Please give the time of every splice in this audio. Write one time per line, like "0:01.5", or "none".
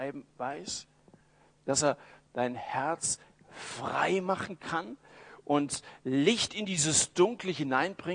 none